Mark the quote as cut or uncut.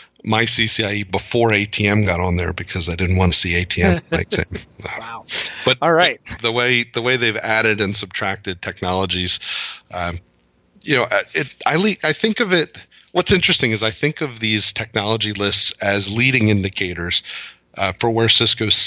cut